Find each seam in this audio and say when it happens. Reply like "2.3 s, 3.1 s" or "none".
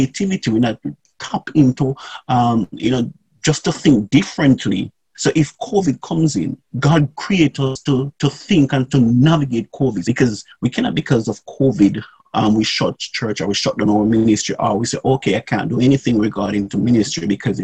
5.1 s, 6.7 s, 10.0 s